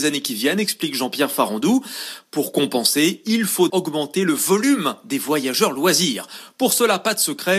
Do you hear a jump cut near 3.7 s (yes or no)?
yes